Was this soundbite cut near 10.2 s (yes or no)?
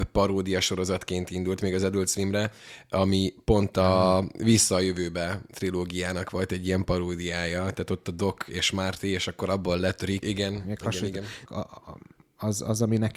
yes